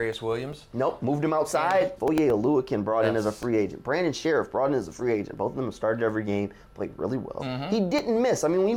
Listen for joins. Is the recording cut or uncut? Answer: cut